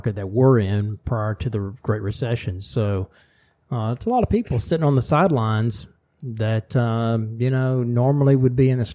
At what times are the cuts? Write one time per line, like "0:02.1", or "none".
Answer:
none